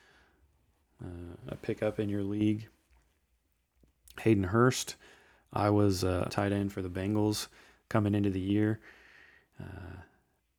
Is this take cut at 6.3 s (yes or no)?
yes